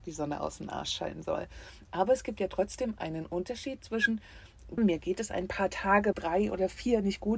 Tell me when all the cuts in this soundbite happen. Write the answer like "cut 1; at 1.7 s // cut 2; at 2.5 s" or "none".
cut 1; at 4.8 s // cut 2; at 6.1 s